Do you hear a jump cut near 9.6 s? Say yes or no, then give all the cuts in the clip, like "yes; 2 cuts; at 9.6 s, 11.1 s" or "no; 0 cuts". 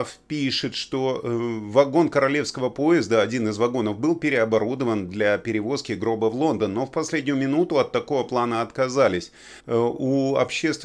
yes; 1 cut; at 9.6 s